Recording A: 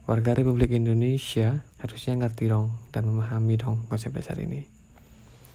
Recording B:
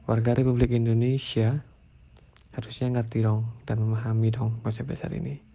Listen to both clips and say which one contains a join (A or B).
A